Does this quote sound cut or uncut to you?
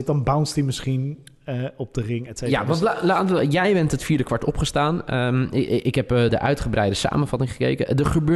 cut